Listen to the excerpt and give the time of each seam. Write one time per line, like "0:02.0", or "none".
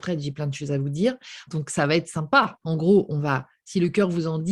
0:01.5
0:02.6